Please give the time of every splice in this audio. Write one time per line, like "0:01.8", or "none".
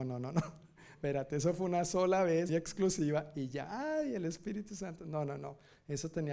0:02.5